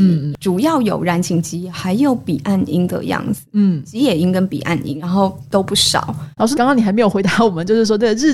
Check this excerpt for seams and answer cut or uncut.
cut